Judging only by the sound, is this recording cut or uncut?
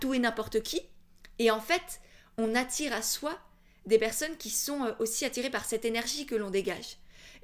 uncut